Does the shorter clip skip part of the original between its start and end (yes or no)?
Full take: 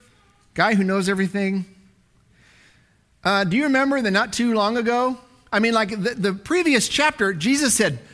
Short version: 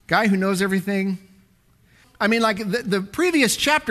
yes